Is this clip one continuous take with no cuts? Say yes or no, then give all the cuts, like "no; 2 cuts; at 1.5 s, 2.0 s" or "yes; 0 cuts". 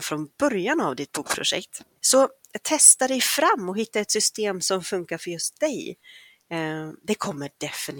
no; 1 cut; at 2.0 s